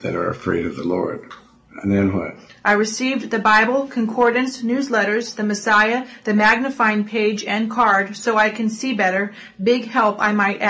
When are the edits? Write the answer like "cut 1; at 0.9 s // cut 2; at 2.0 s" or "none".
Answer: none